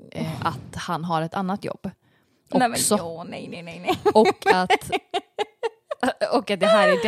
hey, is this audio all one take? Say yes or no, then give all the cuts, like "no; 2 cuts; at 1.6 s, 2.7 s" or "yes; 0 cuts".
yes; 0 cuts